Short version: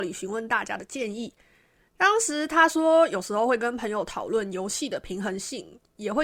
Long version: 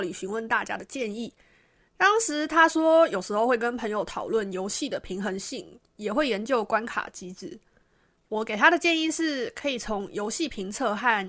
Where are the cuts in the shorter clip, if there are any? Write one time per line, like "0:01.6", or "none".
none